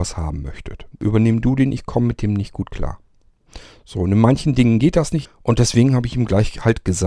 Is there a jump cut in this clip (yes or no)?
yes